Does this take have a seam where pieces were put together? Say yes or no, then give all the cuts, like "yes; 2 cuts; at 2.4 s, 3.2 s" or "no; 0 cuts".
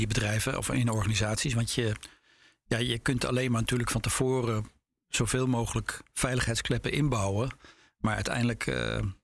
no; 0 cuts